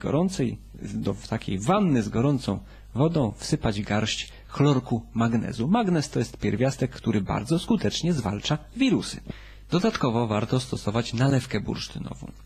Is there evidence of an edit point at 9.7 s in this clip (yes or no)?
no